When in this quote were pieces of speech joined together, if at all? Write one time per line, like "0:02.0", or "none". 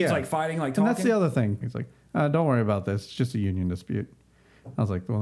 0:01.6